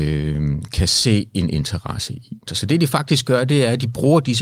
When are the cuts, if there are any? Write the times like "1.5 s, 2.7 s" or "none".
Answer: 2.5 s